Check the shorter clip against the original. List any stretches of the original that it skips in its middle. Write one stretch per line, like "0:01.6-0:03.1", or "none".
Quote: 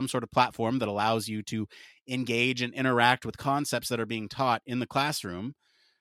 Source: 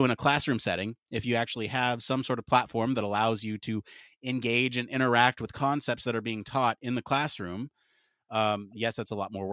none